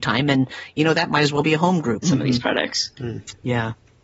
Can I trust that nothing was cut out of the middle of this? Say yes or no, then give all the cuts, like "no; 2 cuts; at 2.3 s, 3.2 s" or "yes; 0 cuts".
no; 1 cut; at 2.0 s